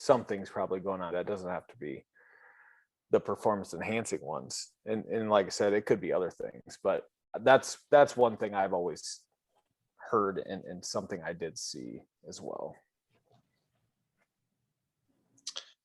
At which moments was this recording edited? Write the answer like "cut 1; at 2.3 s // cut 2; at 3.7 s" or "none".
cut 1; at 1.1 s